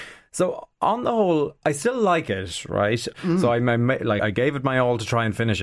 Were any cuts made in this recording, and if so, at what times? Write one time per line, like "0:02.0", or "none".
0:03.1
0:04.2